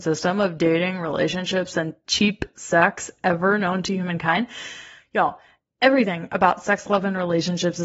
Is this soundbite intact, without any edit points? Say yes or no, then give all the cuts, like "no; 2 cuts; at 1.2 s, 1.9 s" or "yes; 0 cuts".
yes; 0 cuts